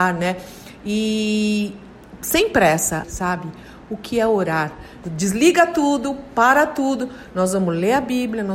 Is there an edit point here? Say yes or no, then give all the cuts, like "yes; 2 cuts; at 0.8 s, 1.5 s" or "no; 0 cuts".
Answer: yes; 2 cuts; at 3.0 s, 5.0 s